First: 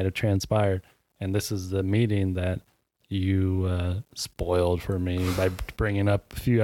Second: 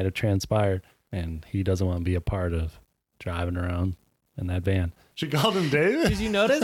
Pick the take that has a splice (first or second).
second